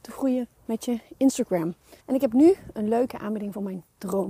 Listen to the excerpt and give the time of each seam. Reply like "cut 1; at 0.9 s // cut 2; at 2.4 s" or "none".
cut 1; at 2.0 s